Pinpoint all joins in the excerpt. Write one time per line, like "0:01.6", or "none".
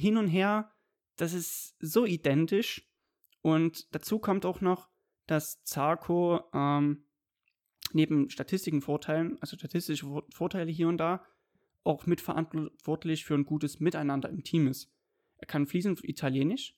none